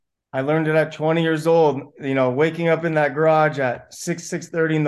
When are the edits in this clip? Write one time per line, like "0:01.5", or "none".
none